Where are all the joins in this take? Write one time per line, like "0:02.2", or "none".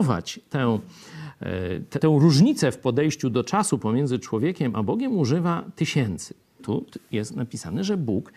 0:02.0
0:06.6